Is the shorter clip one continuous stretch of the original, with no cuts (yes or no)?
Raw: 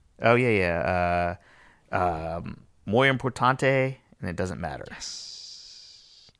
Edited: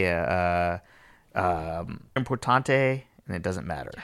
no